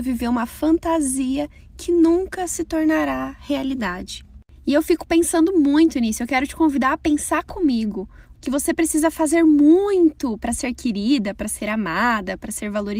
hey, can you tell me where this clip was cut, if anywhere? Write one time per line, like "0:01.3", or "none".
0:08.3